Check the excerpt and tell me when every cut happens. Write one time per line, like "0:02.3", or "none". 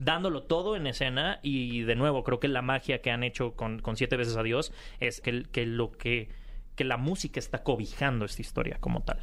0:05.2